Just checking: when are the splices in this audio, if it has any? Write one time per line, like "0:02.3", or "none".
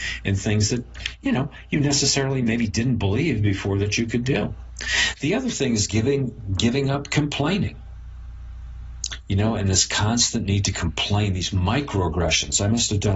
none